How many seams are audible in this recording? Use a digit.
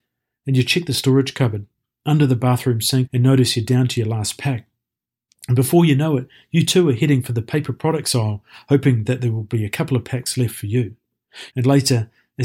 2